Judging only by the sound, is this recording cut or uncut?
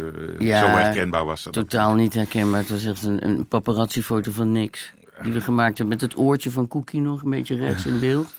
uncut